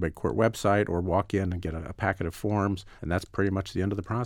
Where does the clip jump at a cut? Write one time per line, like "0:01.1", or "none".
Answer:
0:03.0